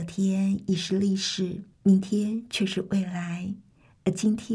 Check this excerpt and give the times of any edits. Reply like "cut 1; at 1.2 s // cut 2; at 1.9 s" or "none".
cut 1; at 1.7 s